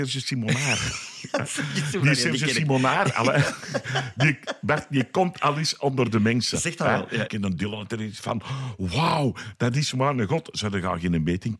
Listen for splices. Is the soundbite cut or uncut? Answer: cut